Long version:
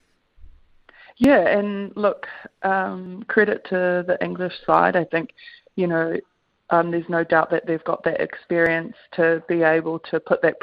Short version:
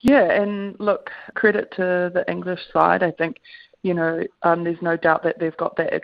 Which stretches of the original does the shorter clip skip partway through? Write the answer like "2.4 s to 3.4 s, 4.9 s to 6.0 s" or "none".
2.5 s to 3.3 s, 6.3 s to 6.6 s